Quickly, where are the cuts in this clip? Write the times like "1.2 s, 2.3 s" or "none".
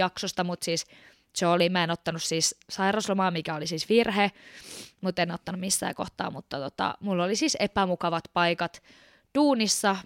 none